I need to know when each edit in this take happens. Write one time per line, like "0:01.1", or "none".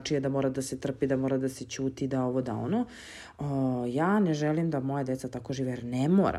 none